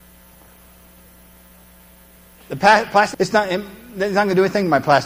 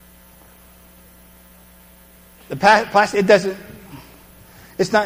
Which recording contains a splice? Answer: first; 1 cut; at 3.1 s

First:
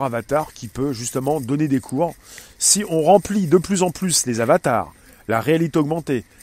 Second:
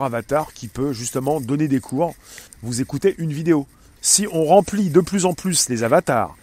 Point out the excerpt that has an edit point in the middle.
second; 2 cuts; at 2.5 s, 4.0 s

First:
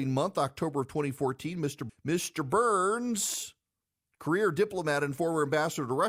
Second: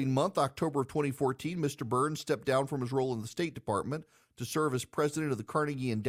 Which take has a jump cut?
first; 1 cut; at 1.9 s

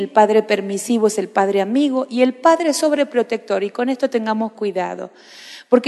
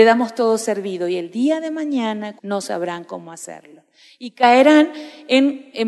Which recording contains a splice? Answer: second; 1 cut; at 2.4 s

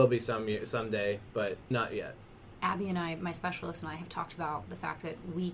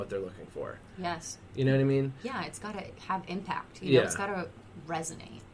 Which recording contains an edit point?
first; 1 cut; at 1.6 s

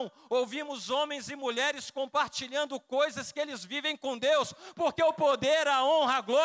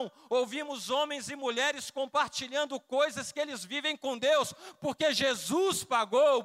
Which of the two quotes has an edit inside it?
first; 1 cut; at 4.7 s

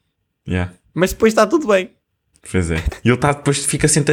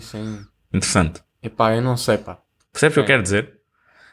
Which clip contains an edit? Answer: second; 1 cut; at 2.6 s

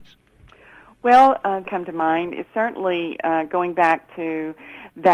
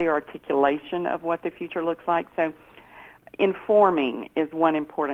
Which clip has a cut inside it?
first; 1 cut; at 1.6 s

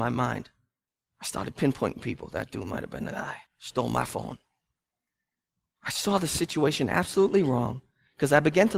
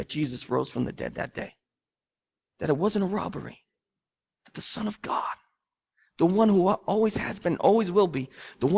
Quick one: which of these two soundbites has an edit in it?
first; 1 cut; at 3.5 s

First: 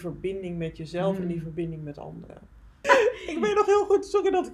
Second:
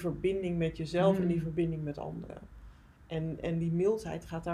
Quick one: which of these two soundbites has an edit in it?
first; 1 cut; at 2.8 s

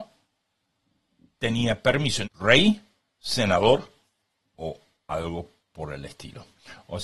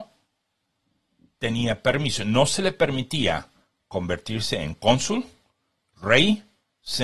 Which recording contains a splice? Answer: first; 1 cut; at 2.2 s

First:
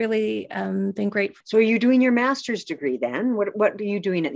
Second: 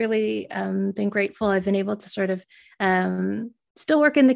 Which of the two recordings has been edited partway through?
first; 1 cut; at 1.4 s

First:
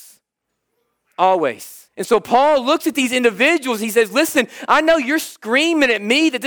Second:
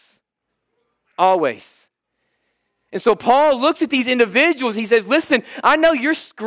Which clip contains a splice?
first; 1 cut; at 1.9 s

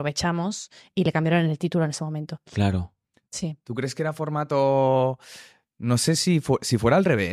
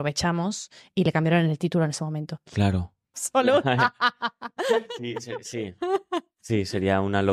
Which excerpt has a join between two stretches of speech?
second; 1 cut; at 3.1 s

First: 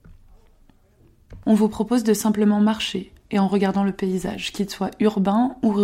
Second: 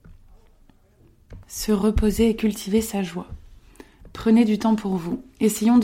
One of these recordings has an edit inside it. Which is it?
first; 2 cuts; at 1.4 s, 3.2 s

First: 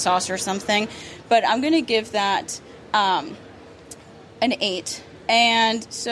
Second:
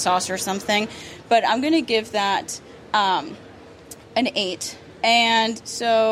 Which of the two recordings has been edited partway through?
second; 1 cut; at 4.0 s

